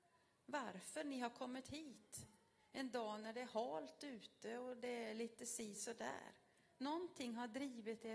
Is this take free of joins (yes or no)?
yes